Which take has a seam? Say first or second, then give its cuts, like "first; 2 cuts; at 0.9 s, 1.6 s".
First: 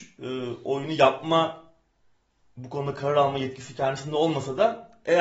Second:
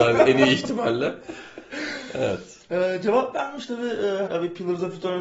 second; 1 cut; at 4.3 s